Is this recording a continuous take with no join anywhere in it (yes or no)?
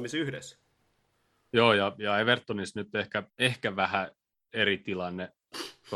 no